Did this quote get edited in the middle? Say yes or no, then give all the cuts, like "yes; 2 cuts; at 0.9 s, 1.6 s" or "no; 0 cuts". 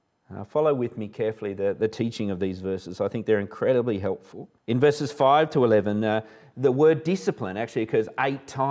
yes; 1 cut; at 4.6 s